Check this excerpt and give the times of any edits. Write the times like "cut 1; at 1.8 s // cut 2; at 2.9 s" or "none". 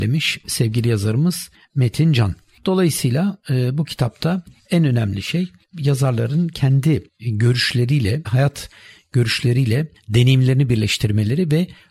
cut 1; at 8.2 s